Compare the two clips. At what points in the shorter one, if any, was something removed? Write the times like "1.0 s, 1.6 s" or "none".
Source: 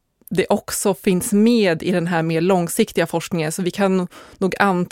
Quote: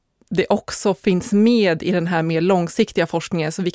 none